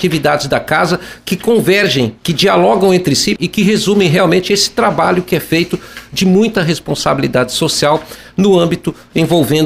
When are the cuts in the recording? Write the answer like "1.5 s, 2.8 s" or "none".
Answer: 2.2 s, 3.4 s